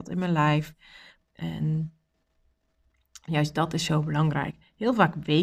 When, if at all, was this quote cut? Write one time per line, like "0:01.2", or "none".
0:01.2